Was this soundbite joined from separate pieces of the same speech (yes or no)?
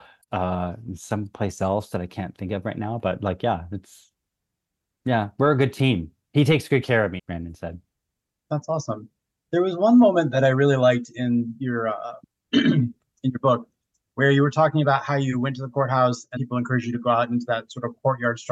yes